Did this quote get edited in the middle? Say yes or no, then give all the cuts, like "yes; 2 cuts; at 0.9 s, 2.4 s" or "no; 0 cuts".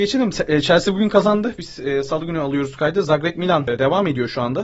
no; 0 cuts